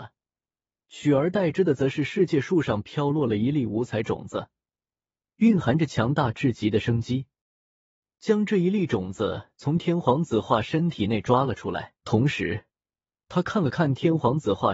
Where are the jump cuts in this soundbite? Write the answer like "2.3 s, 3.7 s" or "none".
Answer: 8.1 s, 12.0 s